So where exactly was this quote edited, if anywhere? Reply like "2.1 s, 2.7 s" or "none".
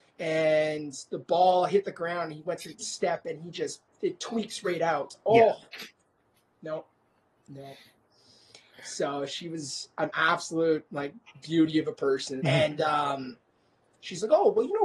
12.4 s